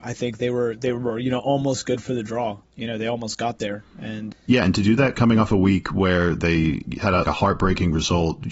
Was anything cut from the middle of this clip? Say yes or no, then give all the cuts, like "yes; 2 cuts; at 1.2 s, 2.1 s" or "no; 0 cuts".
yes; 2 cuts; at 4.3 s, 7.2 s